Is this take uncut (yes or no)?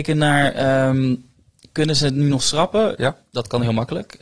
no